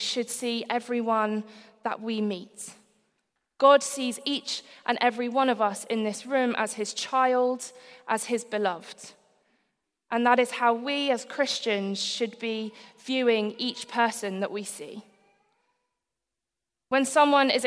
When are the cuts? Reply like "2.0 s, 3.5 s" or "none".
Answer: none